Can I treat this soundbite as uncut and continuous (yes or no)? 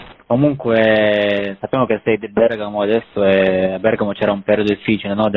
yes